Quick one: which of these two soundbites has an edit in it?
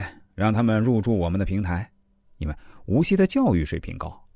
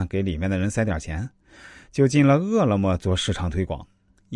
first; 1 cut; at 2.2 s

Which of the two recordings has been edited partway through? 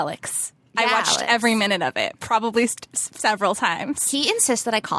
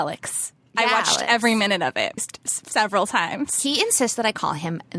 second; 1 cut; at 2.2 s

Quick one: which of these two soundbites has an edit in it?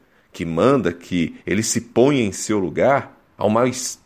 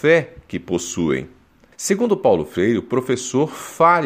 second; 1 cut; at 1.7 s

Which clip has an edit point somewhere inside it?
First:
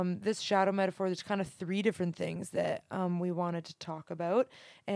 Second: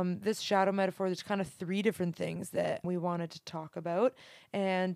second; 1 cut; at 2.8 s

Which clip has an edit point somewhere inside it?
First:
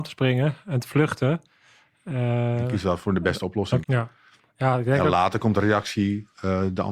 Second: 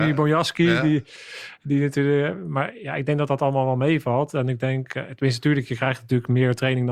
first; 1 cut; at 3.8 s

